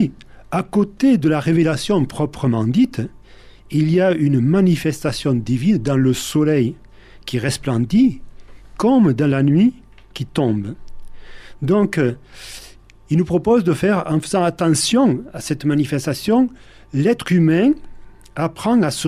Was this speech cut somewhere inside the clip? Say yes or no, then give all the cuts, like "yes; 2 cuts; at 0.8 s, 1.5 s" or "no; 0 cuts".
no; 0 cuts